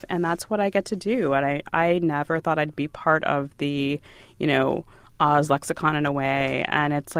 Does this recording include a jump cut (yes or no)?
no